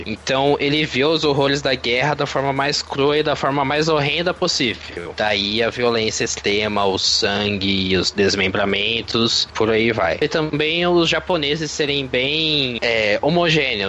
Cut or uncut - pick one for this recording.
uncut